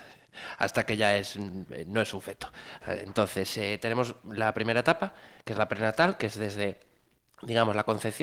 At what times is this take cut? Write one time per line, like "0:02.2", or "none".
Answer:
none